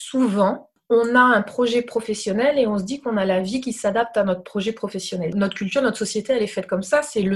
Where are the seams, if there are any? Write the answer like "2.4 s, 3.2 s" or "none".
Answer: none